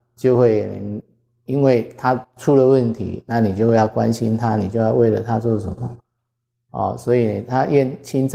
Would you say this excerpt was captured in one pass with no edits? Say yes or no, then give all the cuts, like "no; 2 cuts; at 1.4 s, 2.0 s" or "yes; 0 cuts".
yes; 0 cuts